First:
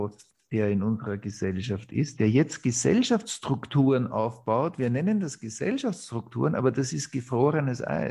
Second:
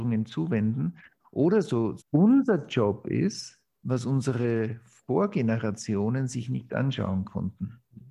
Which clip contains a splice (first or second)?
second